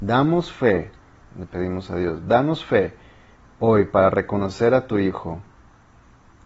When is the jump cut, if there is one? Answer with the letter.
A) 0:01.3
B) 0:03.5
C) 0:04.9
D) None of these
A